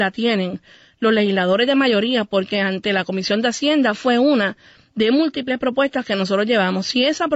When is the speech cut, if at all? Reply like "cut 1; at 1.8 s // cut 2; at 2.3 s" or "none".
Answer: none